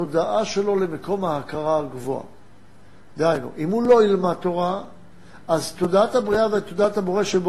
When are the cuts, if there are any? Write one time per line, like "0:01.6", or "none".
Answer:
0:03.1